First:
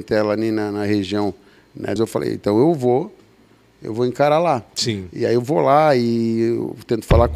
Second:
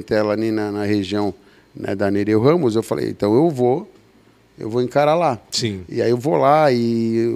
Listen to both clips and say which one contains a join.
first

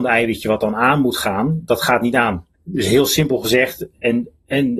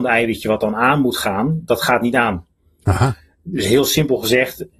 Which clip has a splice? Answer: first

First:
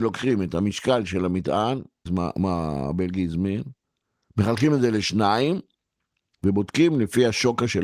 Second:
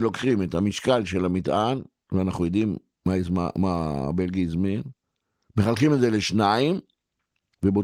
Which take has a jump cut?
first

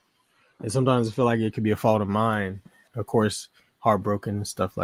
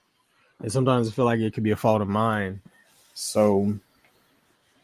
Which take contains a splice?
first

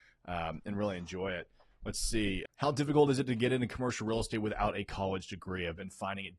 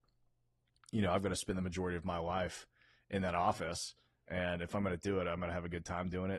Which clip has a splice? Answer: first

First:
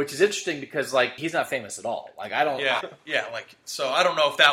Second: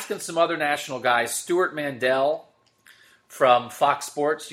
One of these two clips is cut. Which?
first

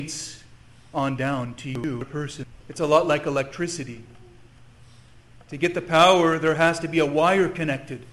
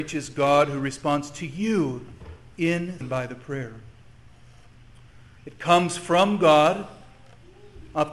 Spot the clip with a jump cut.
second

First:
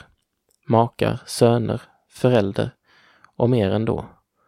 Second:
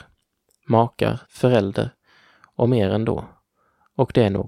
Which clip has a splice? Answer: second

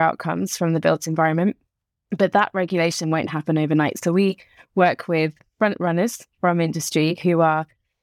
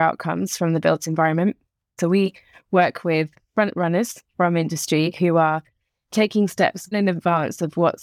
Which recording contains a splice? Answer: second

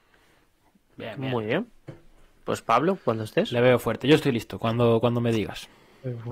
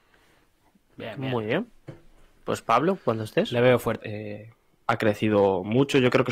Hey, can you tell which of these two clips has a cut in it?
second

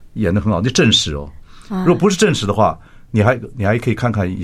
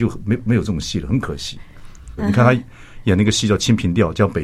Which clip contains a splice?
second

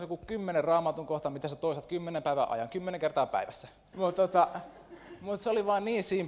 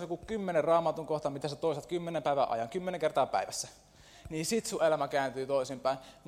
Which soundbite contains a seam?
first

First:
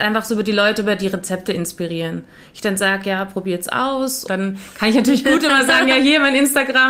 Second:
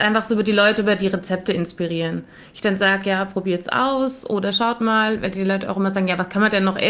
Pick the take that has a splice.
first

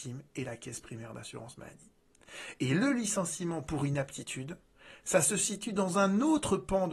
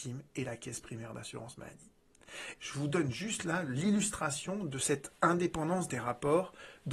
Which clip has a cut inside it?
second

